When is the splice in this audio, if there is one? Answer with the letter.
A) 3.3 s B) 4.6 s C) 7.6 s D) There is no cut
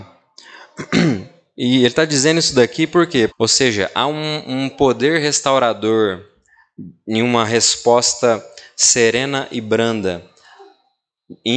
A